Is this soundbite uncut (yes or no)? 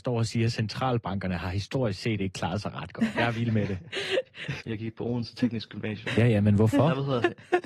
no